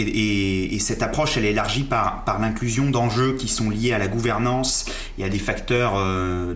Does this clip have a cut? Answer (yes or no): no